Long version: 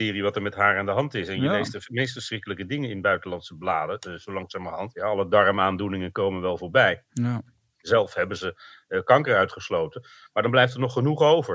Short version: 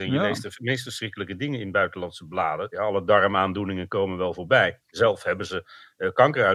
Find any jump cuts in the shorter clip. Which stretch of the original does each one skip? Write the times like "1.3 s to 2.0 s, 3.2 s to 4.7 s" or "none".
4.0 s to 4.9 s, 7.0 s to 7.7 s